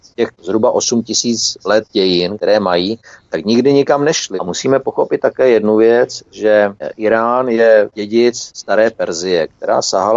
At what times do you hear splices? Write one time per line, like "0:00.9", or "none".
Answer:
0:04.4

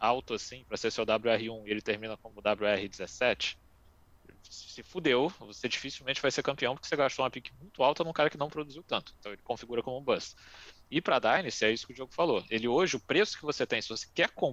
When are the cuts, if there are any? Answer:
none

